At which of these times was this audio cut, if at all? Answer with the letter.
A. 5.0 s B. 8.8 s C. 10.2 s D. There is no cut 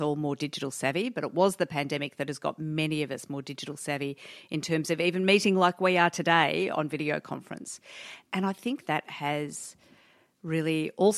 B